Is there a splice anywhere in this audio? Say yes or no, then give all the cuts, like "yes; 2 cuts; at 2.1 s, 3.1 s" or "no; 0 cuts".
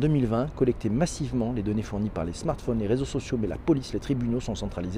no; 0 cuts